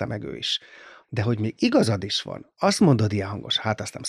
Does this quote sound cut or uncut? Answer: cut